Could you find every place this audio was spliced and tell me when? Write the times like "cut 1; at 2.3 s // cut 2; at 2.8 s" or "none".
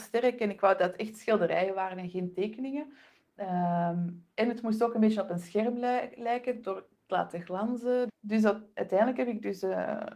cut 1; at 8.1 s